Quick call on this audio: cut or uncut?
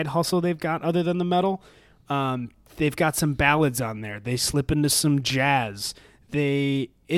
uncut